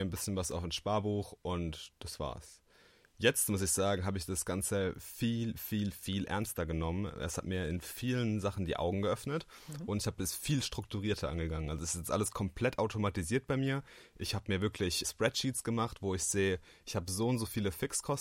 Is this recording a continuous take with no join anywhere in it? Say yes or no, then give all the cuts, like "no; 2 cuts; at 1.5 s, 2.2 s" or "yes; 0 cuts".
no; 1 cut; at 15.0 s